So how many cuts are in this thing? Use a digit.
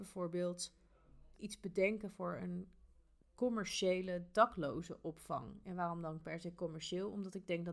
1